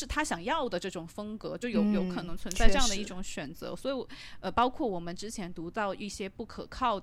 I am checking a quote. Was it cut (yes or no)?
no